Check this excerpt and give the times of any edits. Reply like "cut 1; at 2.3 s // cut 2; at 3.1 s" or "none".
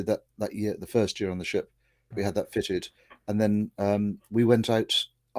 cut 1; at 2.1 s